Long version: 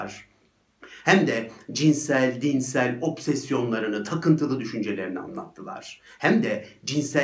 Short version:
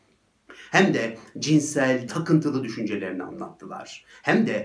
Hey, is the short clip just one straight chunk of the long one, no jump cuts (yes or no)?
no